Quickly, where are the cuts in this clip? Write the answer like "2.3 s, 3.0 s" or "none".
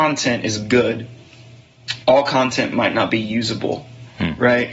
2.0 s